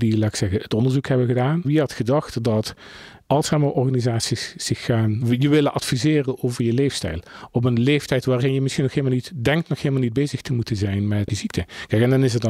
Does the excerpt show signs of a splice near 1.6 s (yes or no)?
yes